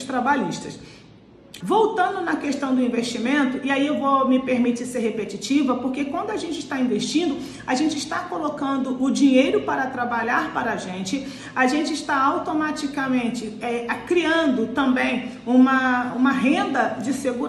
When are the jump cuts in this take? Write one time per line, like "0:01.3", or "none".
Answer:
0:01.6
0:16.1